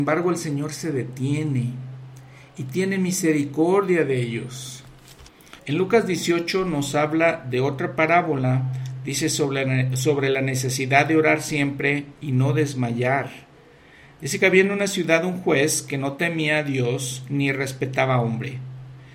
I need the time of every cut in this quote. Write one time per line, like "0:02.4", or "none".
0:05.6